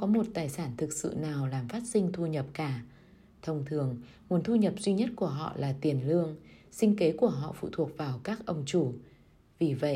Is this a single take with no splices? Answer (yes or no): yes